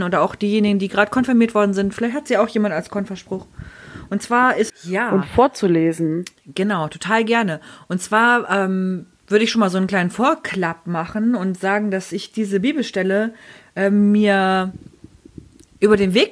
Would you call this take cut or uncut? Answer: cut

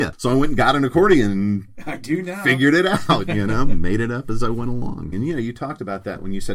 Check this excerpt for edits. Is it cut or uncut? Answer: cut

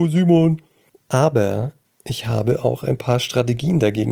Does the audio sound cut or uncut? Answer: cut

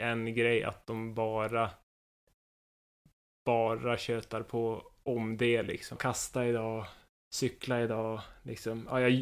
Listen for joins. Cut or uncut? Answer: cut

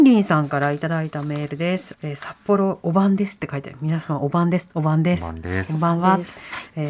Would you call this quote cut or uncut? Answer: cut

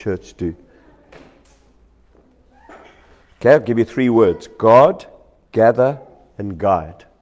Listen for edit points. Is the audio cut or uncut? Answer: uncut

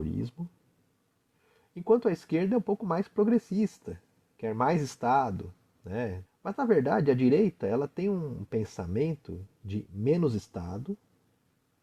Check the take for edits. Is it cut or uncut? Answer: cut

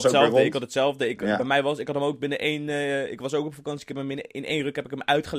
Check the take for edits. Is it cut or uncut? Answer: uncut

